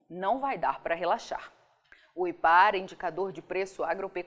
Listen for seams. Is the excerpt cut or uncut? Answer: uncut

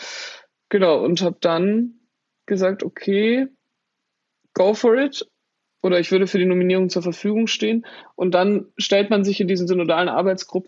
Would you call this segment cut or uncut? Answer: uncut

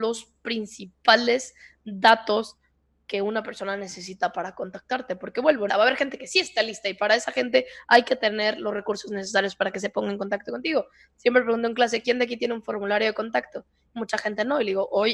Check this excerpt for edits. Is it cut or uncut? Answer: cut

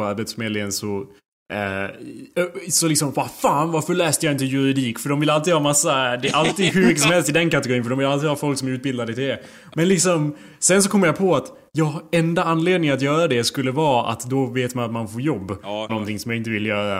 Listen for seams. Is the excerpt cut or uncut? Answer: cut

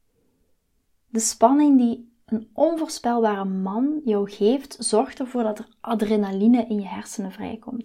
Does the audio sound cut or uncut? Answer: uncut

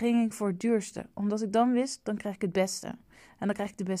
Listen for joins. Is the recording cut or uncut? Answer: uncut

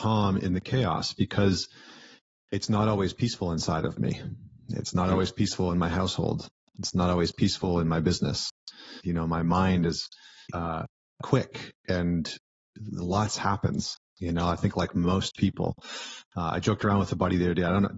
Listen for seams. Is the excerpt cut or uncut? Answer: cut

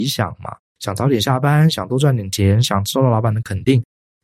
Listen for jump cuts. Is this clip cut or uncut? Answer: uncut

